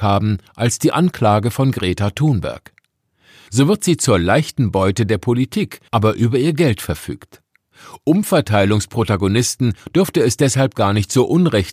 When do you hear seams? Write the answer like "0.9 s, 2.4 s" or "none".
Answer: 3.5 s, 5.9 s